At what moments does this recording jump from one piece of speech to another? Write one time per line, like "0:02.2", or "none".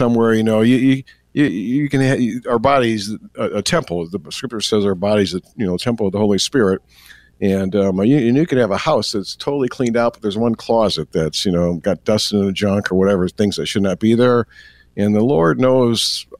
0:01.5